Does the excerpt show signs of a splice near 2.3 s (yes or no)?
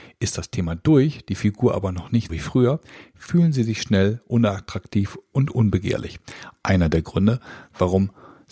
yes